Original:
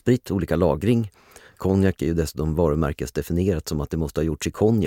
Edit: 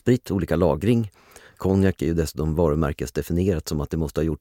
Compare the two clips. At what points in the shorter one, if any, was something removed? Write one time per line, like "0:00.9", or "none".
none